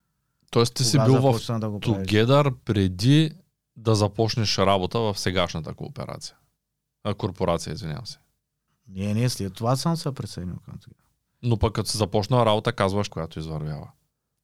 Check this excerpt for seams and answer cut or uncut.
cut